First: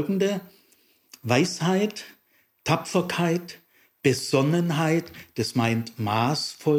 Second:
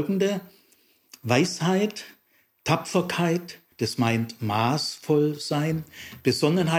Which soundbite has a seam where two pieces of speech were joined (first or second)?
second